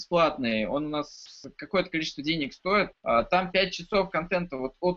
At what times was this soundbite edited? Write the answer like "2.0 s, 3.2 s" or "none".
2.9 s